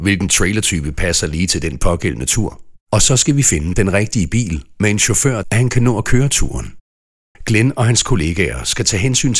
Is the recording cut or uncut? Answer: cut